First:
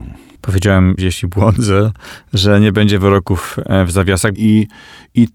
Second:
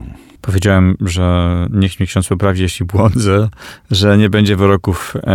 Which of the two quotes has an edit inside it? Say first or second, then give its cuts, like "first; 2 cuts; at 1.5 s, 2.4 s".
first; 2 cuts; at 1.0 s, 4.3 s